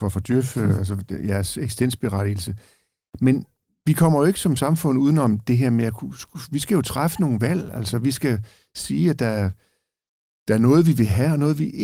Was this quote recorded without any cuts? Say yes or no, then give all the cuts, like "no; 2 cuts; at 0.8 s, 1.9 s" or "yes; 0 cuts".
yes; 0 cuts